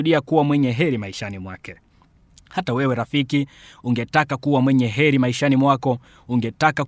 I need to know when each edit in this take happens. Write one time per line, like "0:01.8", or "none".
none